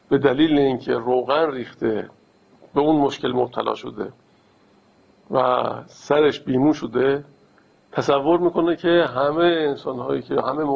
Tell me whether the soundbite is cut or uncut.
uncut